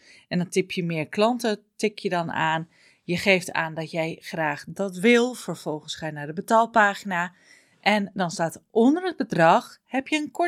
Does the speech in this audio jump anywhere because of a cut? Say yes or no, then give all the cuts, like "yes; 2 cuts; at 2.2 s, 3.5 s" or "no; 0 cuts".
no; 0 cuts